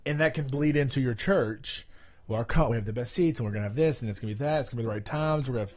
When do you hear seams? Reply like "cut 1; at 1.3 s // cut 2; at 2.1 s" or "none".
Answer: none

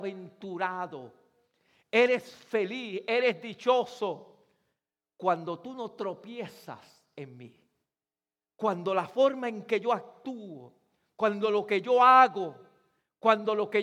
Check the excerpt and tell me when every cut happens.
none

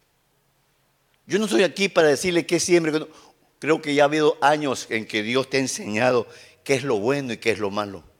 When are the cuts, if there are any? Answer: none

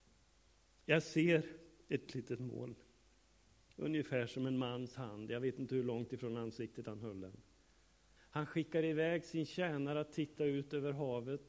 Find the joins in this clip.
cut 1; at 2.1 s // cut 2; at 8.2 s

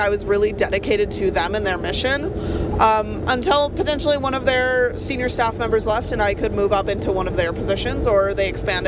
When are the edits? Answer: none

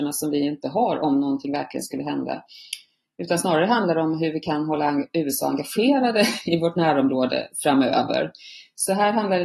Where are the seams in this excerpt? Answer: none

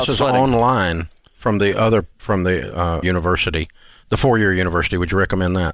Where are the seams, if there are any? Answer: cut 1; at 3.0 s

